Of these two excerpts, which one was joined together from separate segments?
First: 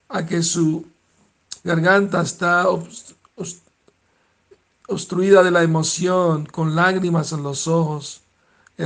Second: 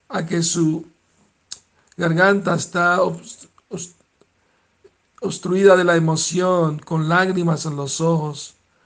first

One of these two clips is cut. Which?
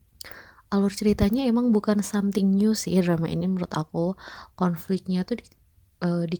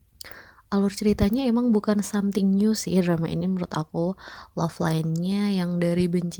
first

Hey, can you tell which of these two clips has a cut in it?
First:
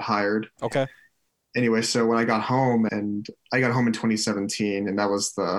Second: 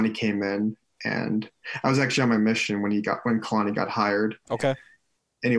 first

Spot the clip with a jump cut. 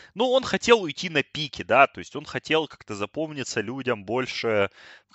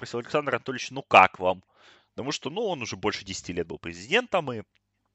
second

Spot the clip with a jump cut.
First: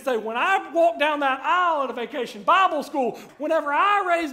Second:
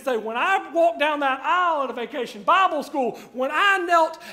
first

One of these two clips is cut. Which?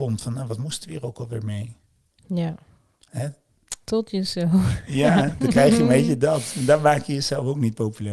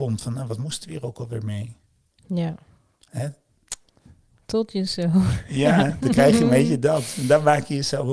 first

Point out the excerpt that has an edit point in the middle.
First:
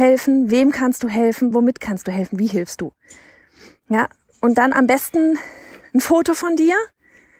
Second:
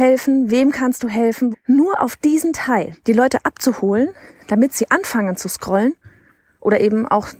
second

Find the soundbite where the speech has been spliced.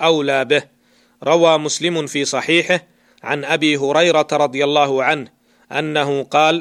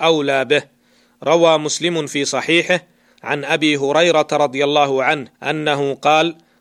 second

